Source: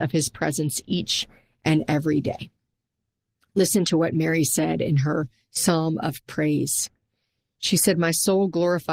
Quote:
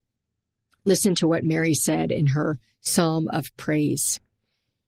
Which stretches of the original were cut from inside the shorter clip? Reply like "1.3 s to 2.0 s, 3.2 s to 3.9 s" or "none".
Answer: none